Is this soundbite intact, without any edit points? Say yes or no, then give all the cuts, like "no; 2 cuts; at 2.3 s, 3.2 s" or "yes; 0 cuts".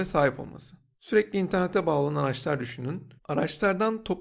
no; 1 cut; at 3.2 s